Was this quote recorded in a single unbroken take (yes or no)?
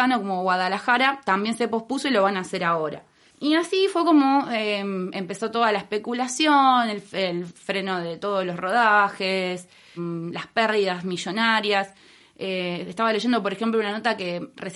no